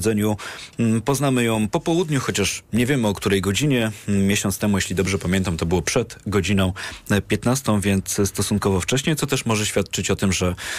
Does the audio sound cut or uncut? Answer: uncut